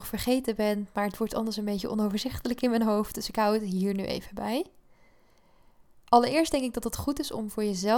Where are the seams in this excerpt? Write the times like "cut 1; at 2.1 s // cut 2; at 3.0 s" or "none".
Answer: none